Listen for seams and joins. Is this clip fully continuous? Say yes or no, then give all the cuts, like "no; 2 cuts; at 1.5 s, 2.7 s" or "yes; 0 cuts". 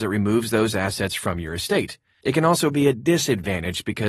no; 1 cut; at 2.2 s